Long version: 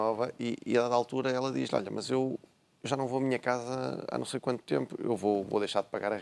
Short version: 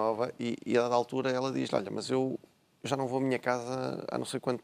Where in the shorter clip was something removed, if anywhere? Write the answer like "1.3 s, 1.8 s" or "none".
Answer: none